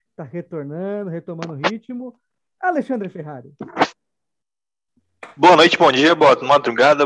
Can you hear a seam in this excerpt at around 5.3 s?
no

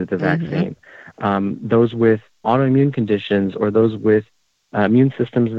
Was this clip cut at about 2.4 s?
yes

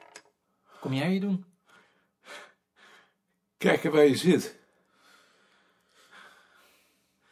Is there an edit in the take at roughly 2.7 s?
no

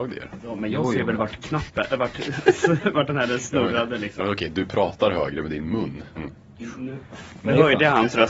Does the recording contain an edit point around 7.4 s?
no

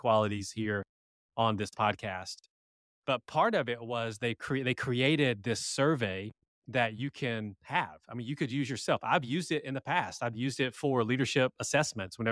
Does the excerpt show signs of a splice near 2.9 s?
no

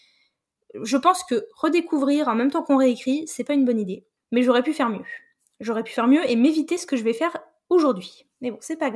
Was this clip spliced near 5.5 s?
no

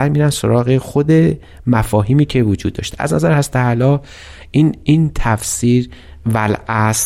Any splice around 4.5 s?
no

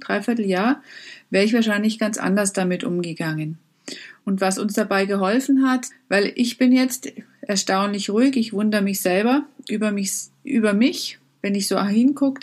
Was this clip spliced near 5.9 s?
yes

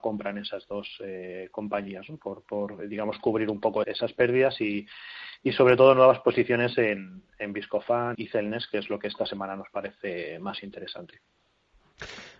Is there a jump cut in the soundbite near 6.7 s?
no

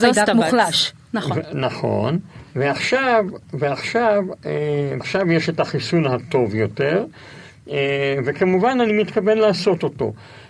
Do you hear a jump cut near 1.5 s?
no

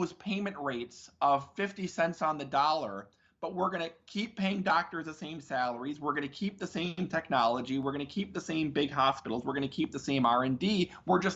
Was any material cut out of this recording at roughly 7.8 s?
no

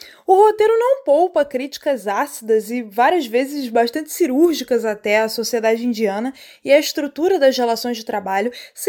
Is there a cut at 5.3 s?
no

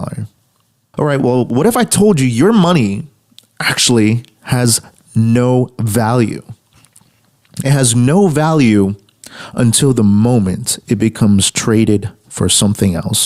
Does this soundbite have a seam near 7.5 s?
no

